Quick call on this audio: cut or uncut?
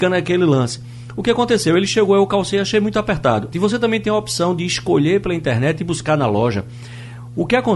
cut